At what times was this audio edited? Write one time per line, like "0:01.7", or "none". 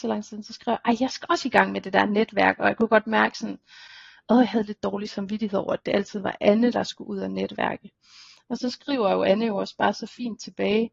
none

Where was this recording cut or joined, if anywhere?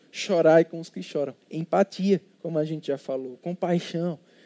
none

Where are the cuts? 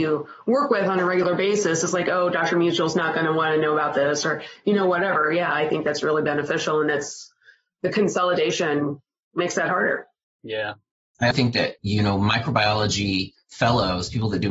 0:11.3

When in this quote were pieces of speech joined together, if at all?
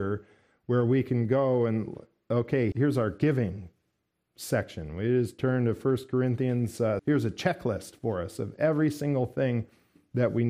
0:02.7
0:07.0

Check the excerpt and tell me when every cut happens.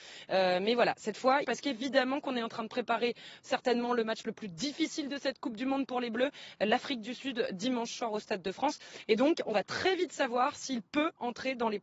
0:01.4

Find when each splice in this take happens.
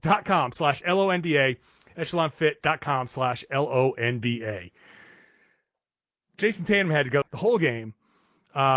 0:07.2

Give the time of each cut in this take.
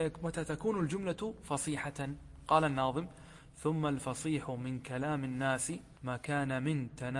0:06.0

